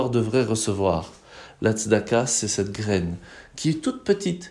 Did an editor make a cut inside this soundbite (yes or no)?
no